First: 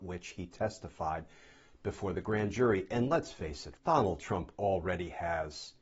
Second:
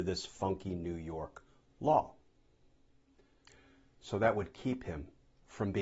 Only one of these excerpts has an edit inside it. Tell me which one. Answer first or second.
first